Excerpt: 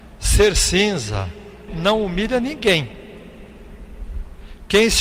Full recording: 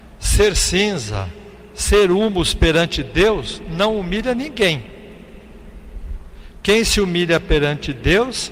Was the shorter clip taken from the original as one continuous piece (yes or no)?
no